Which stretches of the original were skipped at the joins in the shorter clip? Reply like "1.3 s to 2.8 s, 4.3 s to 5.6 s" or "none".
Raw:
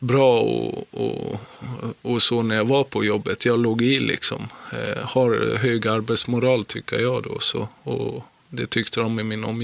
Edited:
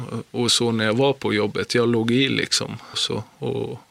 4.6 s to 7.4 s